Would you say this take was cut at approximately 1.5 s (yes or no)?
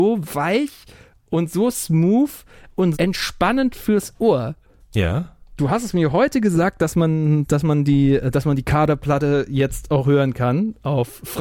no